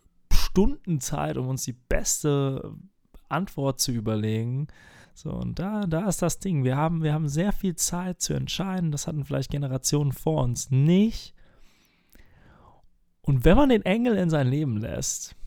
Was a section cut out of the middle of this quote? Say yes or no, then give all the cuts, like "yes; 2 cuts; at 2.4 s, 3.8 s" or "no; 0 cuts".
yes; 1 cut; at 5.0 s